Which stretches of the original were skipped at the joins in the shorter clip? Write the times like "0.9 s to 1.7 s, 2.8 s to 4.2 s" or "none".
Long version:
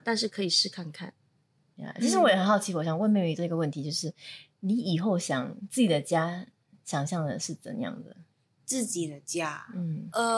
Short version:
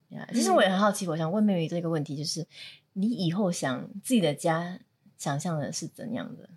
none